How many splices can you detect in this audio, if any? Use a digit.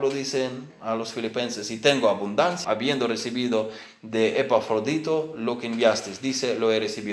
1